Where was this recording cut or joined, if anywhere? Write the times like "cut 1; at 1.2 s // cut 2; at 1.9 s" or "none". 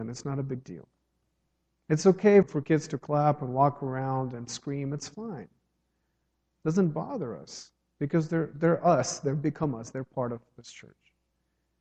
cut 1; at 2.4 s